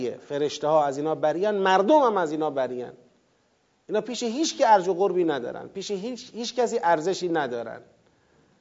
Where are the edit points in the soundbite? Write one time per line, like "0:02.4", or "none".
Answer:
none